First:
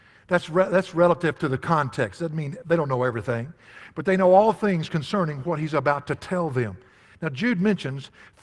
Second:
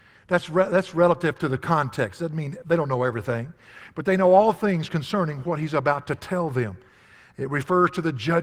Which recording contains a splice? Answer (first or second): first